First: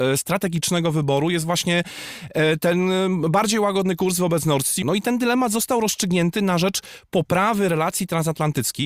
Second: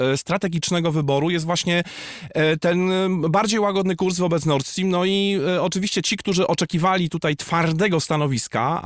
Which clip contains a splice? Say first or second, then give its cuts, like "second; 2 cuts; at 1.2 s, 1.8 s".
first; 1 cut; at 4.8 s